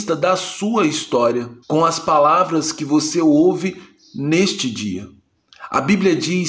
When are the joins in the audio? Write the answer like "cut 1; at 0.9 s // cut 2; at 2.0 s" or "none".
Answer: cut 1; at 1.6 s